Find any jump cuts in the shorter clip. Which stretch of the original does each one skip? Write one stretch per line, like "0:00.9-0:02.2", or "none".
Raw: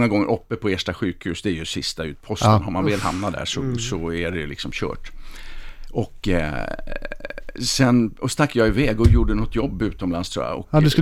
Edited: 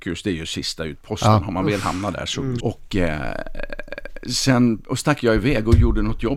0:03.8-0:05.9